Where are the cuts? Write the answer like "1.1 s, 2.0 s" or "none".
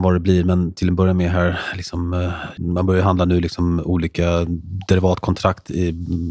2.6 s